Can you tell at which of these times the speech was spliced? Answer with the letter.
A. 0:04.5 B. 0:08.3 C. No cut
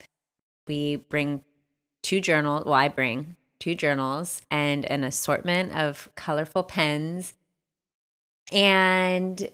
A